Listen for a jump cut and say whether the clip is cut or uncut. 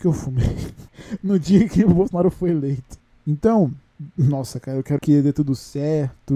cut